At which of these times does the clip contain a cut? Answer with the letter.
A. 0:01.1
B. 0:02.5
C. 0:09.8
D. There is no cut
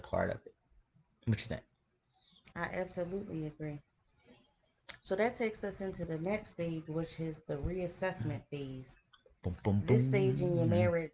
B